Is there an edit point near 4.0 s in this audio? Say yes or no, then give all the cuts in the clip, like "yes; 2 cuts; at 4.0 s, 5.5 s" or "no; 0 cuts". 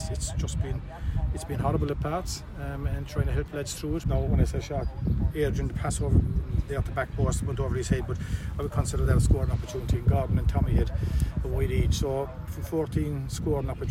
yes; 1 cut; at 4.0 s